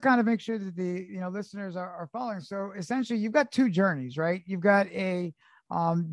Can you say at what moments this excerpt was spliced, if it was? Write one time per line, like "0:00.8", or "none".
none